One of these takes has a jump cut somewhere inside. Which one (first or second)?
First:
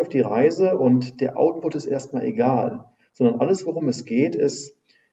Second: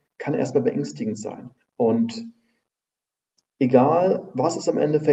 second